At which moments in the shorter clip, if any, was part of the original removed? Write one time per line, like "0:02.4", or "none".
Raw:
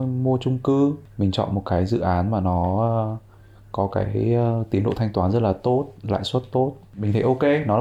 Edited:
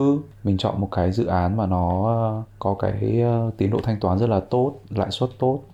0:02.5